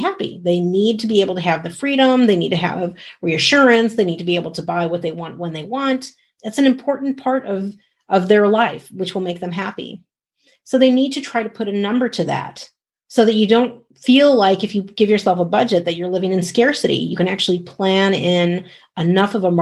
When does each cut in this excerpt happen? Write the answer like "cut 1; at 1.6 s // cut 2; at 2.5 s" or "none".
none